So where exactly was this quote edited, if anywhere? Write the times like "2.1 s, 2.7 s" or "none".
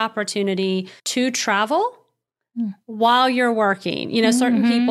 1.0 s